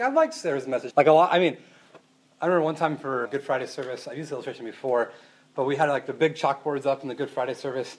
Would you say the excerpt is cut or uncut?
cut